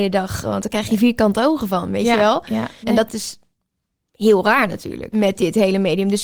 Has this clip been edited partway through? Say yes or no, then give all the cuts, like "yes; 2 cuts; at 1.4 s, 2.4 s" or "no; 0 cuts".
yes; 2 cuts; at 2.8 s, 5.1 s